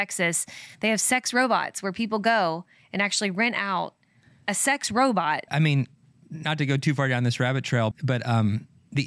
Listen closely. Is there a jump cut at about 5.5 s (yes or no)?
yes